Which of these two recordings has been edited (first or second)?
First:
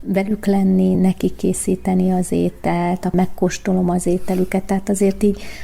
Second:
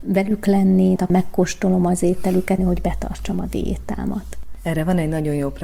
second